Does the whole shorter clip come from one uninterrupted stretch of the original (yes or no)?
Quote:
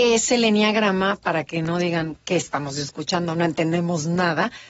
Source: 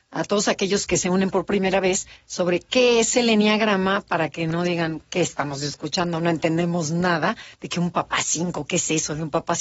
yes